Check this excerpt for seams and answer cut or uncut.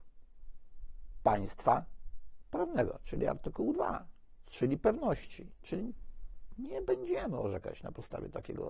uncut